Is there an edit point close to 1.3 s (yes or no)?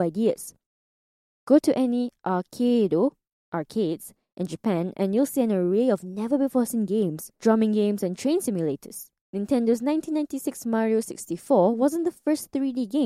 no